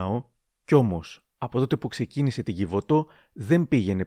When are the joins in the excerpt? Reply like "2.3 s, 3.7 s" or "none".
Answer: 1.3 s